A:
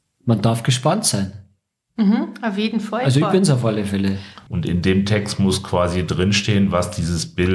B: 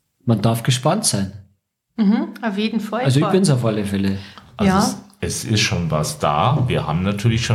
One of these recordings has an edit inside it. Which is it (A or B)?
A